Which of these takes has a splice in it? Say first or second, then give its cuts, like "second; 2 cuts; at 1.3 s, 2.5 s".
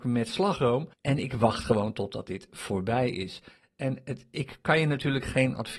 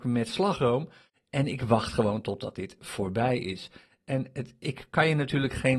first; 1 cut; at 0.9 s